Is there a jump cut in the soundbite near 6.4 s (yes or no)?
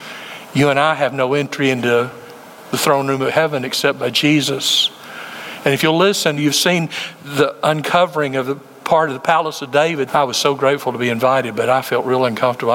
yes